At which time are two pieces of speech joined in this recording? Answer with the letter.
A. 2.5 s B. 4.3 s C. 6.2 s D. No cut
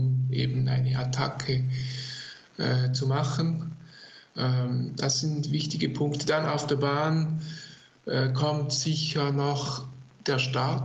D